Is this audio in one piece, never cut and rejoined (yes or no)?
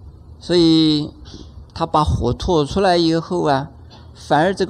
no